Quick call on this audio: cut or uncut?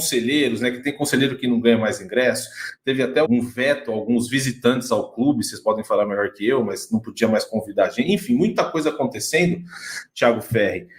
cut